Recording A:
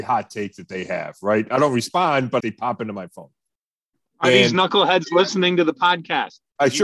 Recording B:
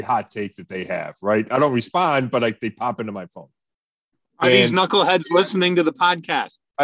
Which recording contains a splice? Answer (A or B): A